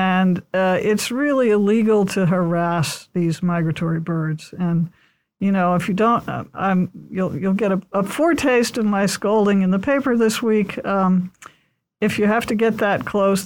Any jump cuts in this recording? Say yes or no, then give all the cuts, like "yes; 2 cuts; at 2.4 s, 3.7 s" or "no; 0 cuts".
no; 0 cuts